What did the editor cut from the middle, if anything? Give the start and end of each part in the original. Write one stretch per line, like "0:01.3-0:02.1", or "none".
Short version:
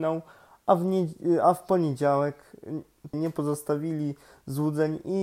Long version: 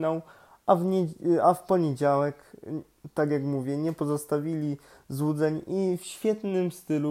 0:03.1-0:03.8